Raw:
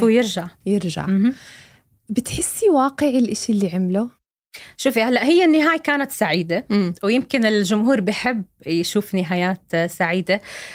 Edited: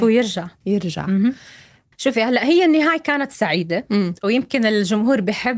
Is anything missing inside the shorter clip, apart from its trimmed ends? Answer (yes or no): yes